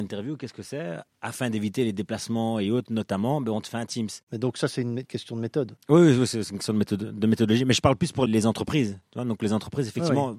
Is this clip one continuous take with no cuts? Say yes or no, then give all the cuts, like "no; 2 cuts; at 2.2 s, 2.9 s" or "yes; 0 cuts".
no; 1 cut; at 4.3 s